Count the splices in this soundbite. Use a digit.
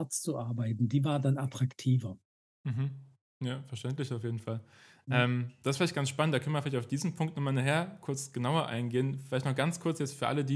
0